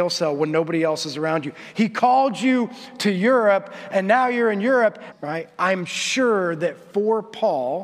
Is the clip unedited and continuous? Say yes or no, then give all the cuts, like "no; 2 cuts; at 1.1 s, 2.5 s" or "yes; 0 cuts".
no; 1 cut; at 5.1 s